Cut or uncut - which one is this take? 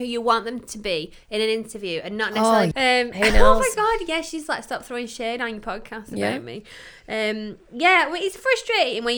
cut